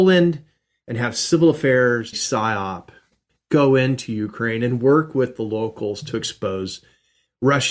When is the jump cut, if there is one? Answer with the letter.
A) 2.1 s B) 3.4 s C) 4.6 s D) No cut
A